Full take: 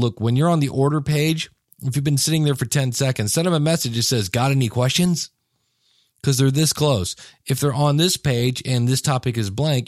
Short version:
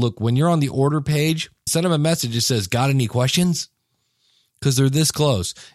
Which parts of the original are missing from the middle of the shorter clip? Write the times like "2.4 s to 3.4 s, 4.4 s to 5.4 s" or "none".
1.7 s to 3.3 s